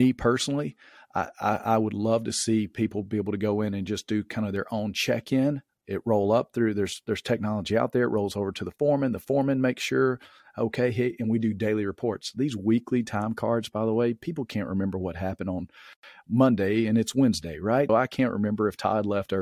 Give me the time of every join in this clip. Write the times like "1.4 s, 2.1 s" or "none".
17.9 s